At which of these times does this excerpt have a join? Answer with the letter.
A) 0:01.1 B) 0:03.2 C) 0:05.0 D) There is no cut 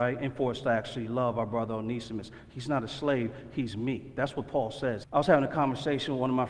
C